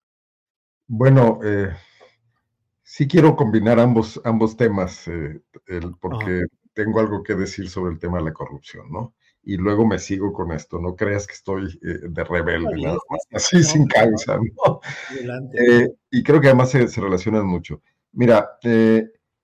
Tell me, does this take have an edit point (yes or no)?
no